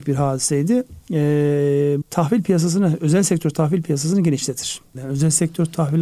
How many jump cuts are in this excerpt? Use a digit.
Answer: 2